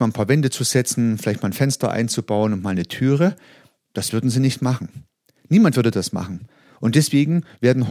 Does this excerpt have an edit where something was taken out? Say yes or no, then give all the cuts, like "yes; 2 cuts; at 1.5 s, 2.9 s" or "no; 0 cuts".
no; 0 cuts